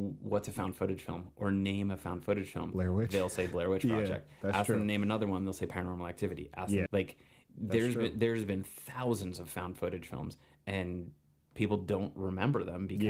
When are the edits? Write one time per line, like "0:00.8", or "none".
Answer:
0:06.9